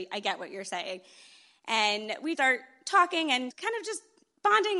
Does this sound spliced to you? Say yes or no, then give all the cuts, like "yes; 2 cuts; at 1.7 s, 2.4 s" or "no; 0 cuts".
yes; 2 cuts; at 2.3 s, 3.5 s